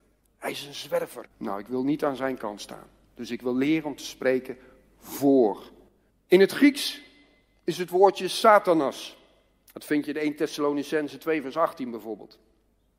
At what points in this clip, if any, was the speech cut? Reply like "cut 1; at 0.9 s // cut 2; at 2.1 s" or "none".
cut 1; at 1.2 s